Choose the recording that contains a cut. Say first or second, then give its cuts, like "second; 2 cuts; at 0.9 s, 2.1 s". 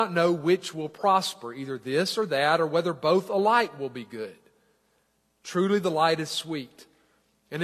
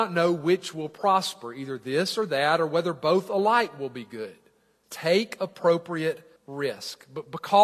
second; 2 cuts; at 4.8 s, 6.4 s